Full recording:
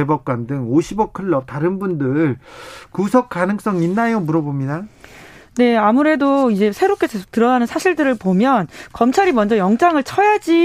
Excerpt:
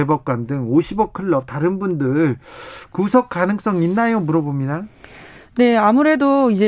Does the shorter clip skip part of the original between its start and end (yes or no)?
no